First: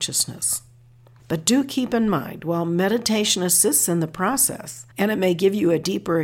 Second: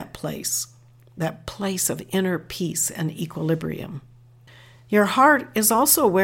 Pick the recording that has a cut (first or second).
first